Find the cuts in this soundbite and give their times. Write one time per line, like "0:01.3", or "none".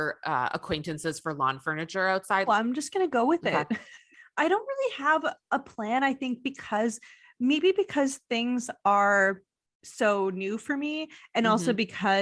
0:02.5